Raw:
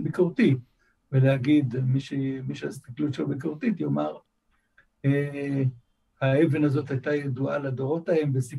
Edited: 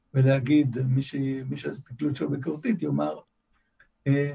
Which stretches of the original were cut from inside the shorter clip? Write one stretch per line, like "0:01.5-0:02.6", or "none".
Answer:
none